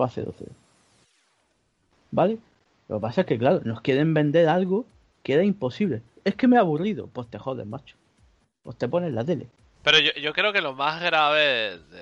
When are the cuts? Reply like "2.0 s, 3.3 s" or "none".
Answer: 9.8 s